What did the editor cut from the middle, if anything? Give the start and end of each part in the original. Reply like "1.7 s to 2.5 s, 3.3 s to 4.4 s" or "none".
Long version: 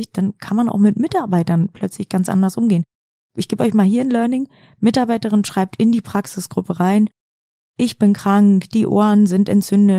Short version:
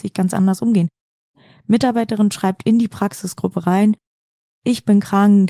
3.3 s to 4.5 s